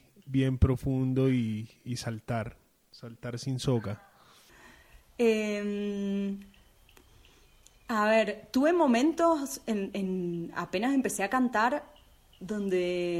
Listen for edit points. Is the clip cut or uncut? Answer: uncut